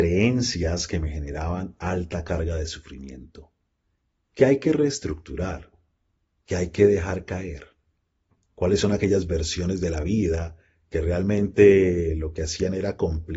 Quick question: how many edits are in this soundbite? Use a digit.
0